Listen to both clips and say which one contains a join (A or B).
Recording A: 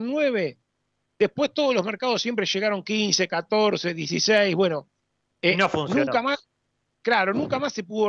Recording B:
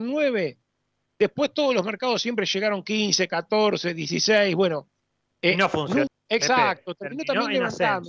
B